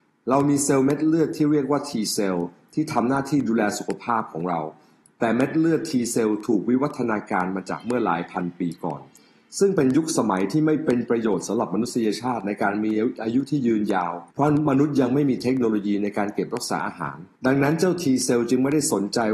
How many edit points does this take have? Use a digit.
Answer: 2